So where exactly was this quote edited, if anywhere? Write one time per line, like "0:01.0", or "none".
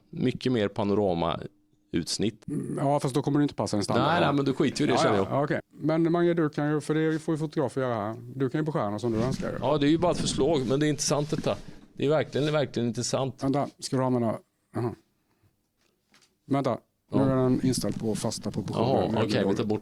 0:05.6